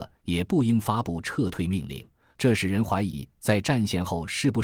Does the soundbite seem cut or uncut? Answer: cut